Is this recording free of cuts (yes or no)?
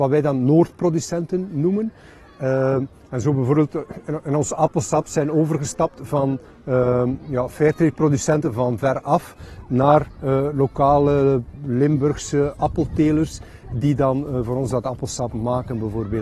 yes